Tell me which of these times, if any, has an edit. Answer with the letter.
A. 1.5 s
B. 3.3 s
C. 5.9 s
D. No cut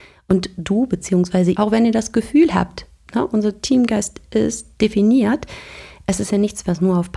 A